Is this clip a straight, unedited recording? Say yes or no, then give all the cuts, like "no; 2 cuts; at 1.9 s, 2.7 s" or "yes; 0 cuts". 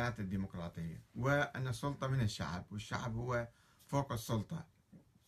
no; 1 cut; at 1.1 s